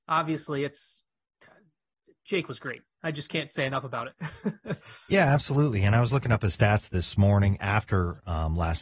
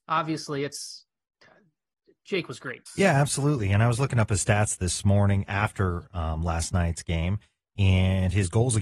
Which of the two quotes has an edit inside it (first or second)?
second